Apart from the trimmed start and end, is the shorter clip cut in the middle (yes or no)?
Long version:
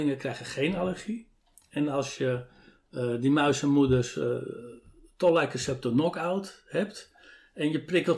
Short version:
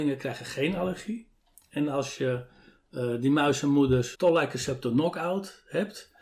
yes